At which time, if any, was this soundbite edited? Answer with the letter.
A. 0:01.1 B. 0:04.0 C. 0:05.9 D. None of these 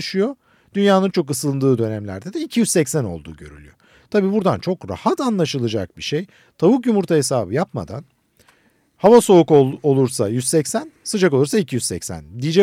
A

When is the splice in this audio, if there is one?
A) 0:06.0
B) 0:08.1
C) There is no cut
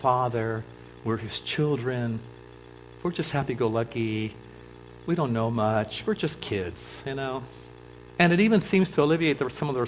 C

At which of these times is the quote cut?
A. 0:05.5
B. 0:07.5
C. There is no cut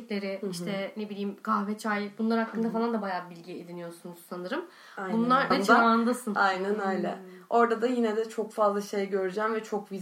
A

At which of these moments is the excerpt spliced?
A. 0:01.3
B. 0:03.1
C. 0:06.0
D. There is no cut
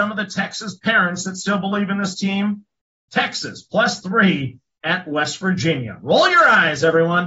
B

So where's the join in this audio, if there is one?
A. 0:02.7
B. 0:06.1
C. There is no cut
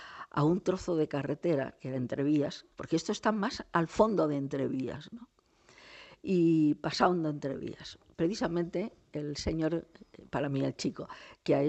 A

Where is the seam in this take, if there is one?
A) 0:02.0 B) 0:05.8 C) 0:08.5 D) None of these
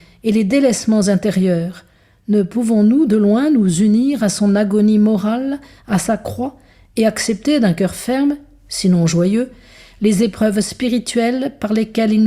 D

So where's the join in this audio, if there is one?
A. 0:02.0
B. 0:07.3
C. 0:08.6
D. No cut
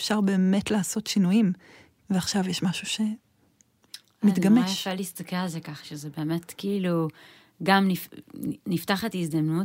A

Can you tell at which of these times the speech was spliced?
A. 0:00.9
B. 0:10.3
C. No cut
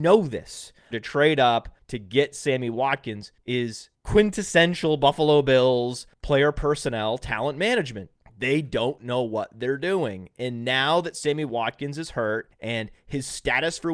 A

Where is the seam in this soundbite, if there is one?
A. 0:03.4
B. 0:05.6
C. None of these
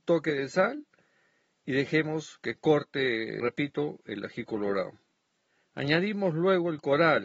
A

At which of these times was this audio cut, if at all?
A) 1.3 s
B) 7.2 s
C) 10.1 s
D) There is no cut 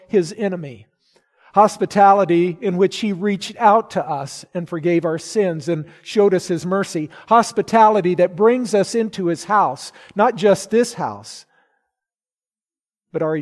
D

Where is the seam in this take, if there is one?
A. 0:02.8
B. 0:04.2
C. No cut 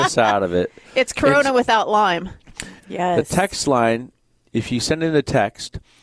A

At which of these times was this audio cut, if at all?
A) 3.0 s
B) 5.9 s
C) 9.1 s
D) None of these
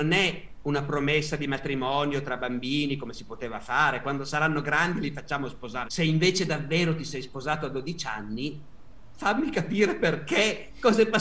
B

